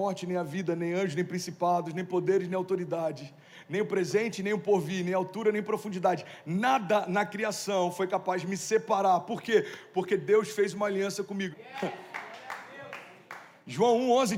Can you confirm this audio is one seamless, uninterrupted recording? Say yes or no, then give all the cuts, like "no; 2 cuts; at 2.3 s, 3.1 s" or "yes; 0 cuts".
no; 1 cut; at 11.5 s